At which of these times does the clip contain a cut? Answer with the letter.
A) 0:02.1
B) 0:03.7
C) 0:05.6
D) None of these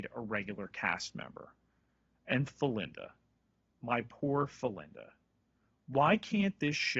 D